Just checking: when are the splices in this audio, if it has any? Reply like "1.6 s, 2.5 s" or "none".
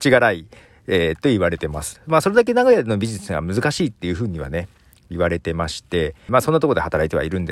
6.3 s